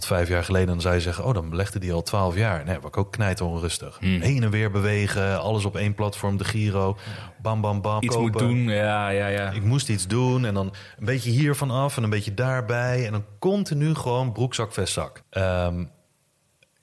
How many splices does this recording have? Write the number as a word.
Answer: two